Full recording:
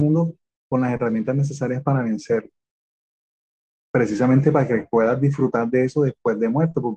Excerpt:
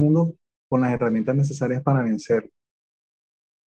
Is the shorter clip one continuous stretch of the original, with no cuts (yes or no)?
yes